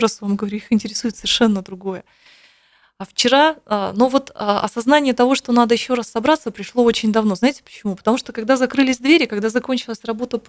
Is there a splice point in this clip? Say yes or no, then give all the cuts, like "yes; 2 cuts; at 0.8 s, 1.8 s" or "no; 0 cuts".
no; 0 cuts